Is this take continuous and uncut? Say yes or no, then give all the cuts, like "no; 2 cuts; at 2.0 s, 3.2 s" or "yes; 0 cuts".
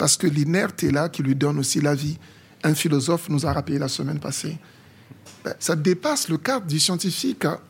no; 1 cut; at 5.6 s